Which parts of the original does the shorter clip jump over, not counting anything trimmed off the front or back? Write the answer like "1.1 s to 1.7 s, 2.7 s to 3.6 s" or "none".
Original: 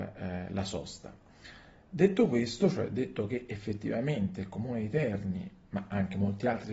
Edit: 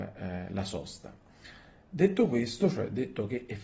none